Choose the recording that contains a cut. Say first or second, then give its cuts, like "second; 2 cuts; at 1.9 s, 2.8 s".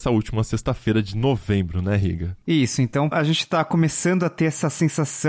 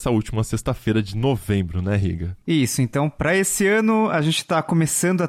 first; 1 cut; at 3.1 s